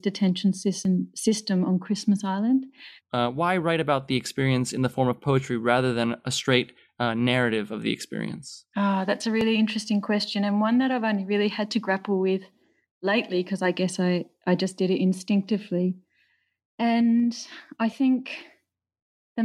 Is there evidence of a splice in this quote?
yes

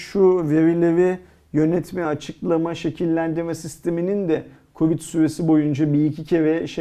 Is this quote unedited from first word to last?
yes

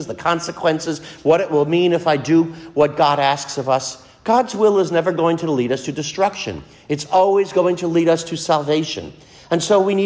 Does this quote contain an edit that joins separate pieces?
no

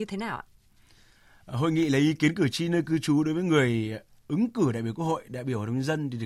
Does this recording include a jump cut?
yes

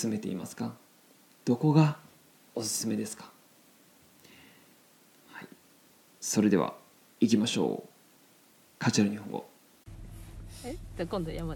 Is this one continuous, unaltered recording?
yes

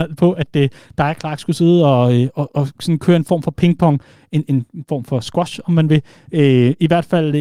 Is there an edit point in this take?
no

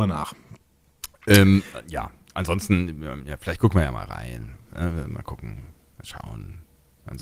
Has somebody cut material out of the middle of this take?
no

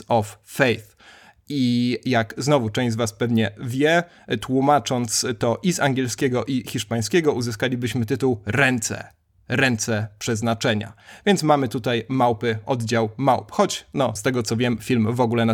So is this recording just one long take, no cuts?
no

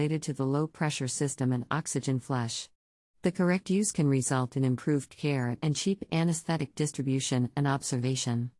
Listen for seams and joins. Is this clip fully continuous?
yes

